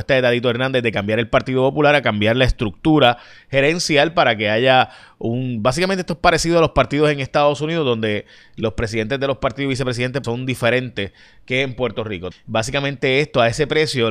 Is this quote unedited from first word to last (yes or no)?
no